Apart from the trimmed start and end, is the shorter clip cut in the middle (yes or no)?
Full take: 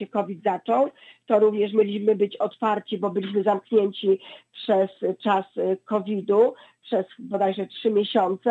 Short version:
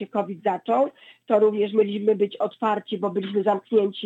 no